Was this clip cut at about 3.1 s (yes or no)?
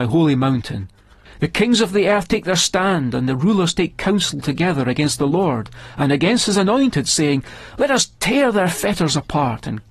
no